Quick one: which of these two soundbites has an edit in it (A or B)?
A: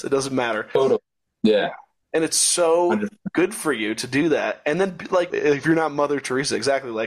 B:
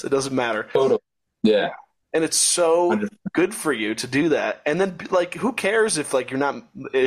A